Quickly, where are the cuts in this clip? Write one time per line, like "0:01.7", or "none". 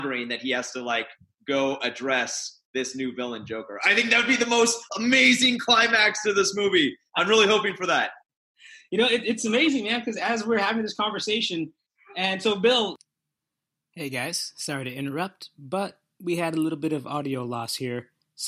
none